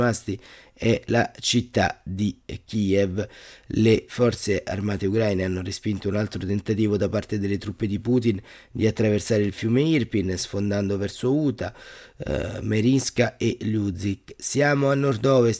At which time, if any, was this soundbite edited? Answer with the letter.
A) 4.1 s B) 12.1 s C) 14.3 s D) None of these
A